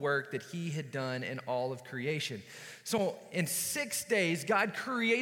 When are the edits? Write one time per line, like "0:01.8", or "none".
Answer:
none